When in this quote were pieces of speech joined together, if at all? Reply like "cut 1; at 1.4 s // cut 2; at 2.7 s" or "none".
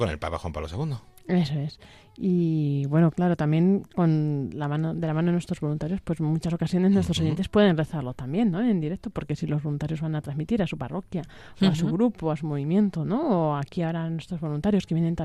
none